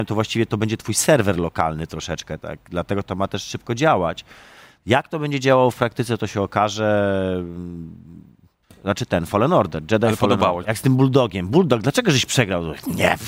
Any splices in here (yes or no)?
yes